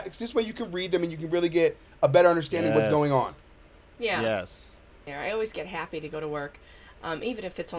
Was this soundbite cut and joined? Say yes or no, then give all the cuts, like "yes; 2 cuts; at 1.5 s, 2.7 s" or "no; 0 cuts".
no; 0 cuts